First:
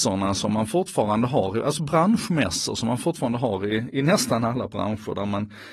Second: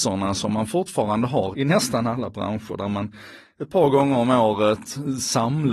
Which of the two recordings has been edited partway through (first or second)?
second